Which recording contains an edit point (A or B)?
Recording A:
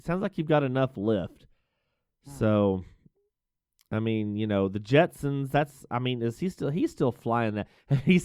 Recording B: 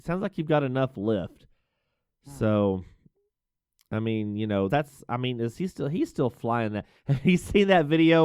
B